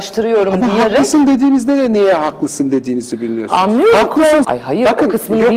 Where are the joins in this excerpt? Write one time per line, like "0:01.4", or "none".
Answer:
0:04.4